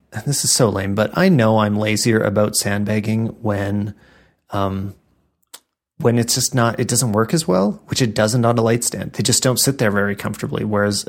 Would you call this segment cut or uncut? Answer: uncut